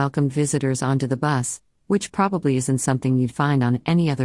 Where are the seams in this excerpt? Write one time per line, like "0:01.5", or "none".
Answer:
0:01.8